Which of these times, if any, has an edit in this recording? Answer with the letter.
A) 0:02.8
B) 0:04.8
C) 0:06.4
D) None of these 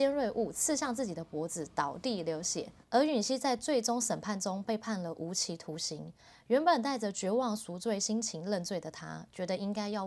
A